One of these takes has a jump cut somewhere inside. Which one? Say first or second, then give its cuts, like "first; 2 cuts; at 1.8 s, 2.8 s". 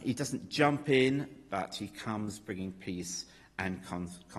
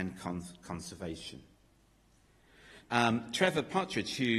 second; 1 cut; at 2.8 s